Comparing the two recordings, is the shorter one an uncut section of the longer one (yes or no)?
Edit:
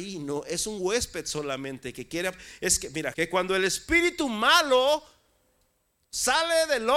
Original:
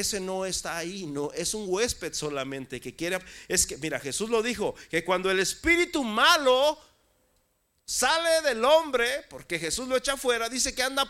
no